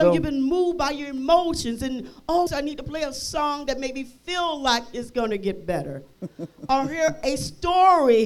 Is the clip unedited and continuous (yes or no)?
no